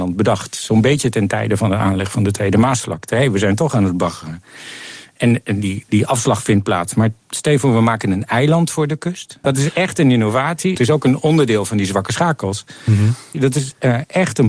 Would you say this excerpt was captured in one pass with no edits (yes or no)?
no